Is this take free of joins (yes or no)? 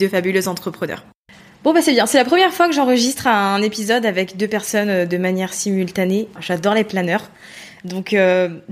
no